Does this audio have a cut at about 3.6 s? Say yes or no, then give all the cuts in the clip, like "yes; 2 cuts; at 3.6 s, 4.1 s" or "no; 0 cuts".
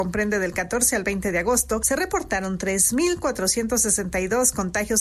no; 0 cuts